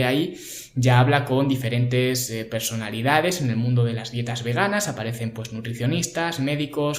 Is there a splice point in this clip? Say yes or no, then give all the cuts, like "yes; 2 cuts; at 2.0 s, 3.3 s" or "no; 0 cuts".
no; 0 cuts